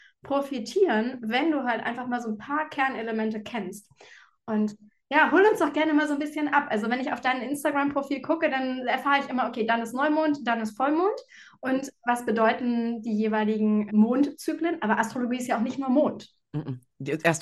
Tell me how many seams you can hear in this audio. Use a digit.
1